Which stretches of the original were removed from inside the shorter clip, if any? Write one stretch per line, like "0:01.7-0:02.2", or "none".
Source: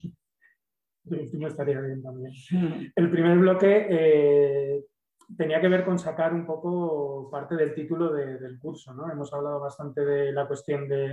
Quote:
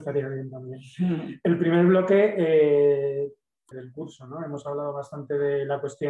0:05.2-0:08.4